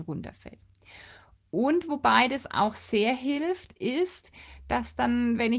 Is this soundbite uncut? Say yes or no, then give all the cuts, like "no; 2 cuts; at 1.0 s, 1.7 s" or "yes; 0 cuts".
yes; 0 cuts